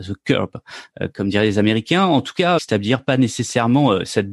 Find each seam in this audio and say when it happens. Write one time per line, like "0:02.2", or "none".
0:01.1
0:02.6